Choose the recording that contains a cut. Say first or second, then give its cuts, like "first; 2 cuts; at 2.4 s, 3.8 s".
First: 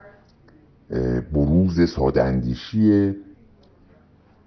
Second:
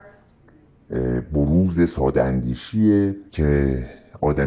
second; 1 cut; at 3.3 s